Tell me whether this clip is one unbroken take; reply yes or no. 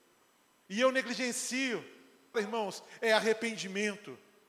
no